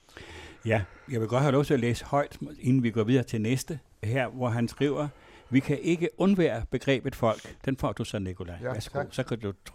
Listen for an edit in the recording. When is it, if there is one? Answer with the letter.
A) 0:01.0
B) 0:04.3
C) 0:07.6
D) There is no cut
D